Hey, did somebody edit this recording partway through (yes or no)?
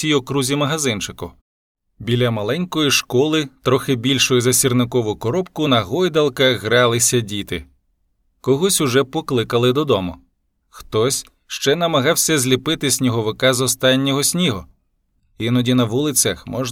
no